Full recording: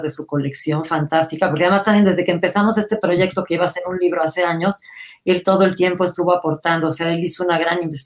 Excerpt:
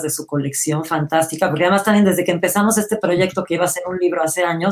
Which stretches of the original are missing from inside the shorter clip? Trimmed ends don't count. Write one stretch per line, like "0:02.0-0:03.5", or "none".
none